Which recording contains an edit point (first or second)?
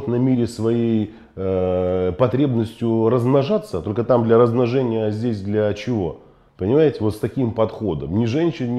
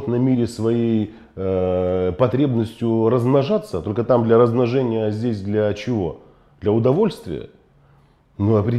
first